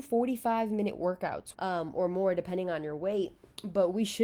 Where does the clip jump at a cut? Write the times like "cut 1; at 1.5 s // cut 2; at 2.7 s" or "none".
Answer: cut 1; at 1.5 s